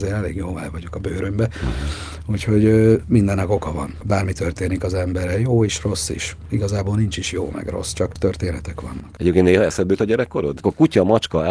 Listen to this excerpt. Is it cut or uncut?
cut